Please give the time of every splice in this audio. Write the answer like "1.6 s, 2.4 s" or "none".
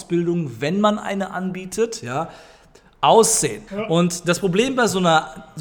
3.7 s